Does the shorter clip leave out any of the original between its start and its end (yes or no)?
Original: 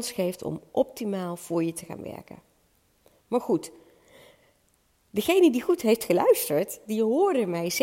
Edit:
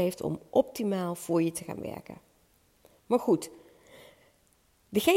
no